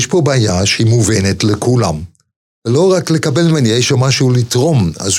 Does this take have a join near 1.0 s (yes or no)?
no